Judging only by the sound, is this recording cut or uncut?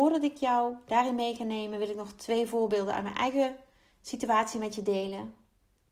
uncut